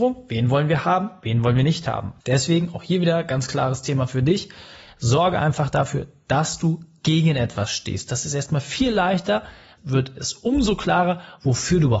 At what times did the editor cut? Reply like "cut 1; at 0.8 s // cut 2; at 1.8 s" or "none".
cut 1; at 2.2 s // cut 2; at 9.8 s